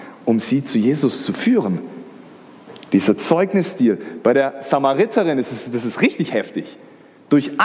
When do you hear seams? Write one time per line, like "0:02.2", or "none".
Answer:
none